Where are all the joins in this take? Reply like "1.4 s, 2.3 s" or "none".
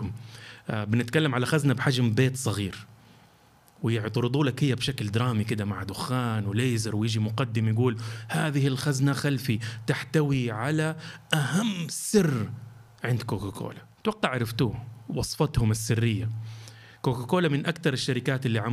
13.9 s